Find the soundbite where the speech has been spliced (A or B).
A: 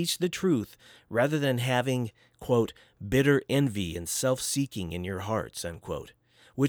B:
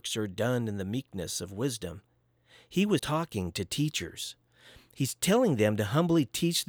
B